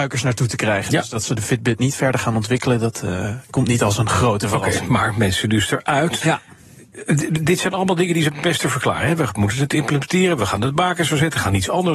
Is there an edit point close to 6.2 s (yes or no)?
yes